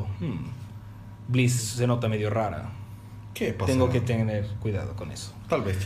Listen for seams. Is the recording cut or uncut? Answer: cut